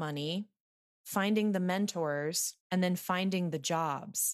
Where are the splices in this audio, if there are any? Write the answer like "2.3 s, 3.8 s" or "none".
2.6 s